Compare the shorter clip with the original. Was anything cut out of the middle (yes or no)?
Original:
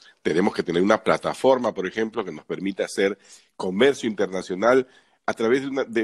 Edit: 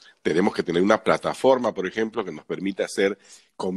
no